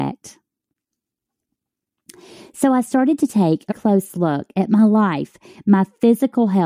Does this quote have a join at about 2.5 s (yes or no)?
no